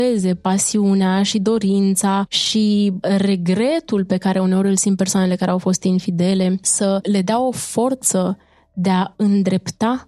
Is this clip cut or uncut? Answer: uncut